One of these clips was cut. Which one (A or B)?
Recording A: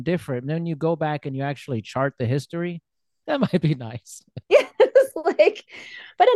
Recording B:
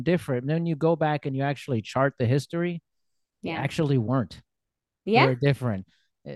A